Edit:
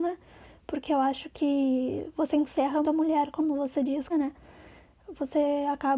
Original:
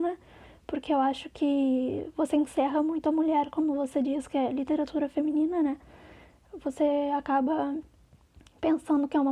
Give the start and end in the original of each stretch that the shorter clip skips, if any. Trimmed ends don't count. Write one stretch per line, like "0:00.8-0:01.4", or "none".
0:02.8-0:03.0
0:04.3-0:05.5